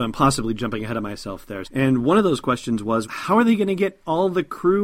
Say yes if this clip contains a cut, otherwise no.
yes